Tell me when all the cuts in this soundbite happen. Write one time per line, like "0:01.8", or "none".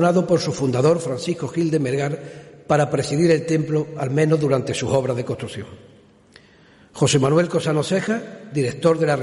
none